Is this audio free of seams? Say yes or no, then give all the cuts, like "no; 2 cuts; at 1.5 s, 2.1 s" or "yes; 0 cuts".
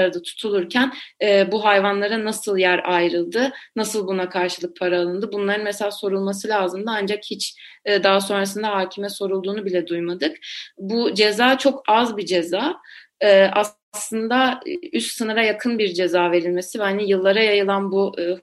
yes; 0 cuts